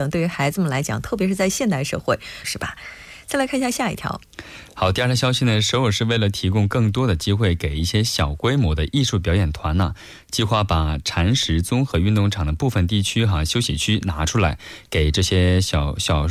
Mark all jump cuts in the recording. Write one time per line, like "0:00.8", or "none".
0:02.4